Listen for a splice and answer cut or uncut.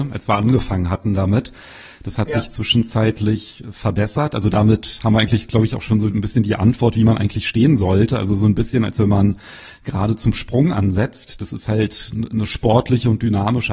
uncut